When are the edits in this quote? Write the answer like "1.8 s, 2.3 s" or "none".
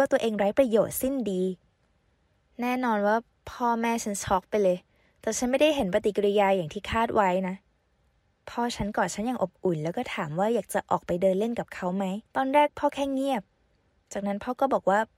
12.3 s